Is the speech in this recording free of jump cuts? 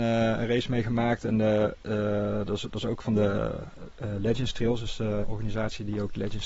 no; 1 cut; at 5.2 s

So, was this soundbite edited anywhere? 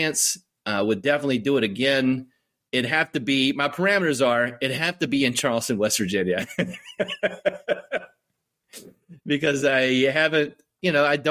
no; 0 cuts

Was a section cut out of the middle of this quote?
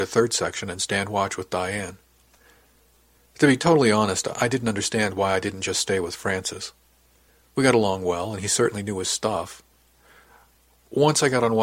no; 0 cuts

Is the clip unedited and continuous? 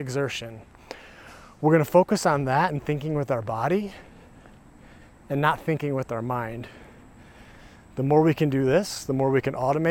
yes; 0 cuts

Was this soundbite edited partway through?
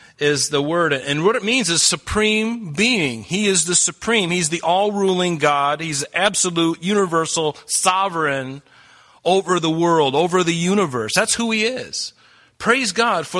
no; 0 cuts

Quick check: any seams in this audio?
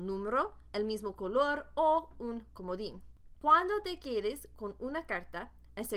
no; 0 cuts

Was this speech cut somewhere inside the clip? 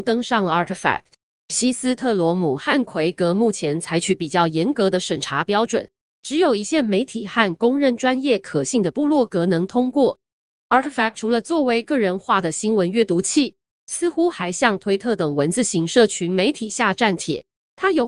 no; 0 cuts

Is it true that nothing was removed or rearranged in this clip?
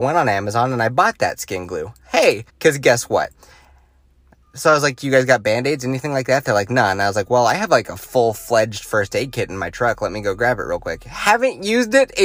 no; 1 cut; at 2.5 s

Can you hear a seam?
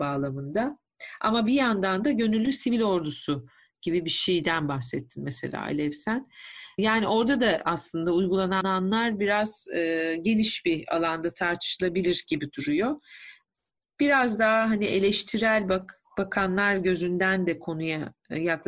no; 0 cuts

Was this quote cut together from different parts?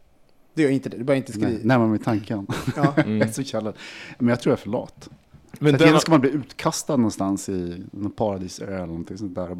no; 0 cuts

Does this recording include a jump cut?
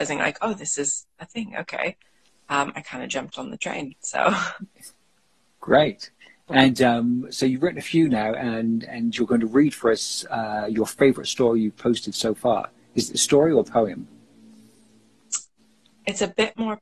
no; 0 cuts

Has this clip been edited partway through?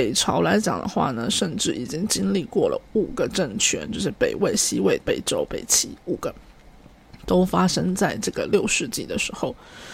yes; 1 cut; at 5.0 s

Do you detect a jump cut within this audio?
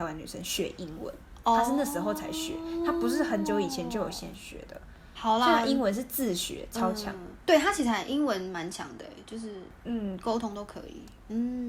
no; 0 cuts

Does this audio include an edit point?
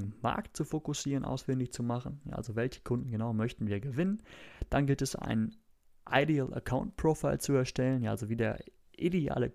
no; 0 cuts

